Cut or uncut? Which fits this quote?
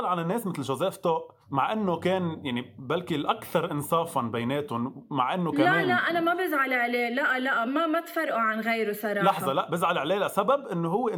cut